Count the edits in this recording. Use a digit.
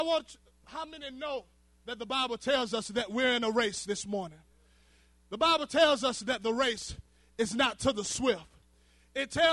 0